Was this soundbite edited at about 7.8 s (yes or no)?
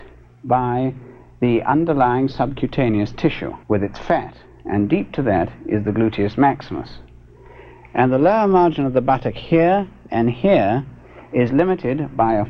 no